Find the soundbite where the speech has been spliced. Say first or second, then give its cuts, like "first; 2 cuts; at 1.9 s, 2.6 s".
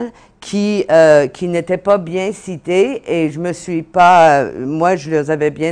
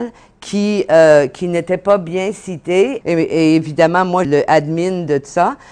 second; 2 cuts; at 3.0 s, 4.2 s